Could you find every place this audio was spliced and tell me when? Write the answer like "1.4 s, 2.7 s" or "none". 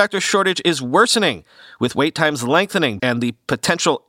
3.0 s